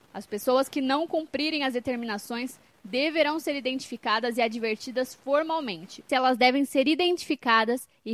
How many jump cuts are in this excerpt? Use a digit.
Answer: 1